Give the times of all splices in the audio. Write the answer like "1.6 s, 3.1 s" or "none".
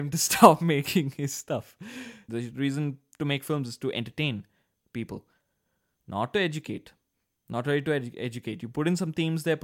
2.3 s